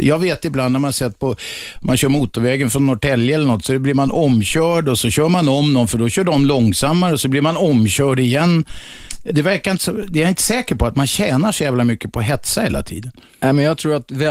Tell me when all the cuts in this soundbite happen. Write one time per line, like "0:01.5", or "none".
0:09.3

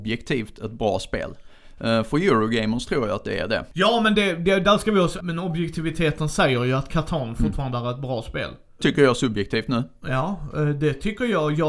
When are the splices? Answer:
0:05.2
0:08.8

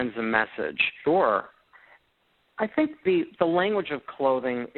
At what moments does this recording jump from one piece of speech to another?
0:01.0

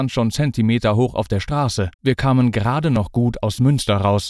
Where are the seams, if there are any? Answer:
0:01.9

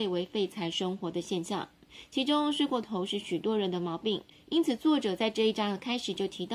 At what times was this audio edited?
none

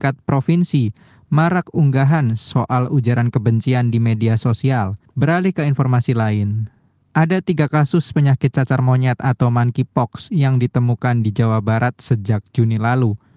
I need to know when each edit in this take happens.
0:05.1

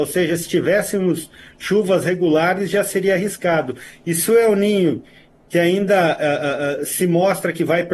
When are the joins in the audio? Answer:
none

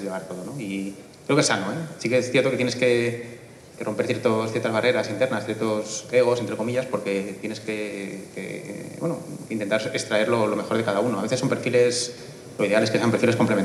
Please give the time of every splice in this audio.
none

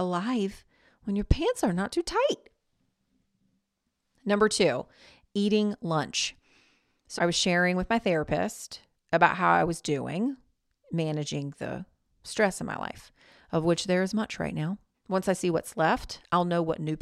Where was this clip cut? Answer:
0:07.2
0:14.9

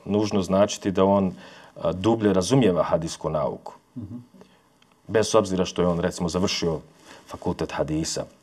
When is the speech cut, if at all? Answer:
none

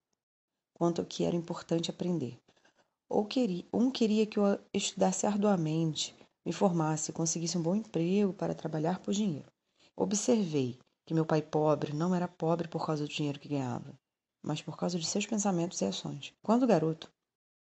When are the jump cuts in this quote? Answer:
0:09.9
0:14.3
0:16.4

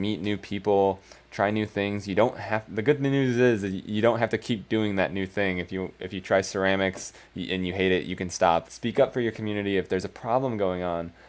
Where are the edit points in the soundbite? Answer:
0:08.7

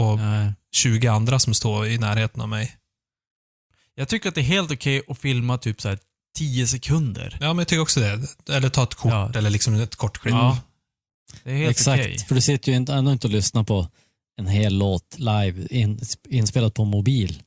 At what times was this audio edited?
none

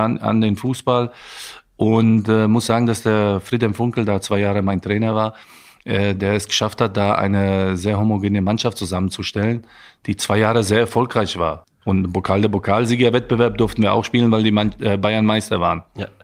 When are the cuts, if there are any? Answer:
0:11.6

